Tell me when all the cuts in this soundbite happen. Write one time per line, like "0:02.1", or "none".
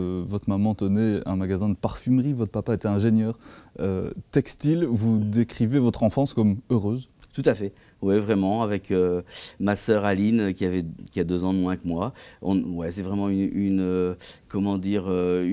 none